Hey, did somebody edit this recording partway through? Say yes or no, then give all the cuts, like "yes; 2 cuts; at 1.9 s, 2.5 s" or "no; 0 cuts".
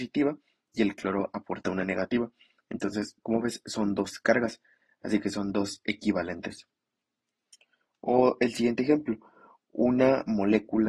no; 0 cuts